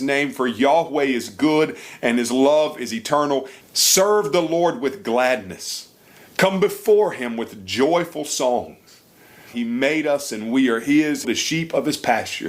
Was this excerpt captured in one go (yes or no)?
no